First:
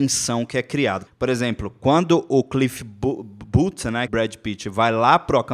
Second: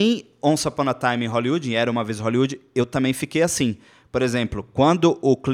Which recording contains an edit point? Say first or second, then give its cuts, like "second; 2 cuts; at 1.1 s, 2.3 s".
first; 2 cuts; at 1.1 s, 4.1 s